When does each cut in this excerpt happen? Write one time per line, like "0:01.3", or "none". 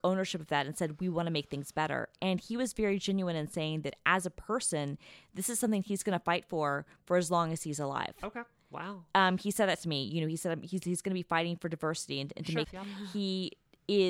0:12.6